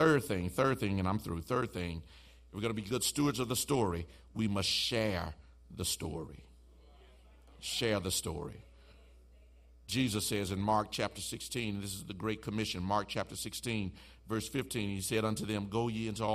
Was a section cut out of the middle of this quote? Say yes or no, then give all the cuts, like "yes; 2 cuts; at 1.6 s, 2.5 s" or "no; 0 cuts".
no; 0 cuts